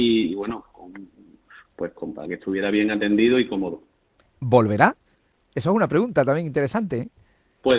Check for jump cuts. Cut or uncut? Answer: uncut